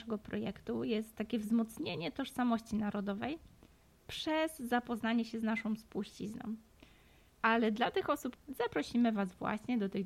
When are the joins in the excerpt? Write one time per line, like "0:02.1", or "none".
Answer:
0:07.3
0:08.4